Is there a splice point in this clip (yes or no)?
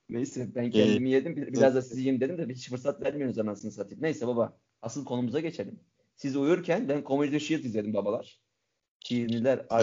no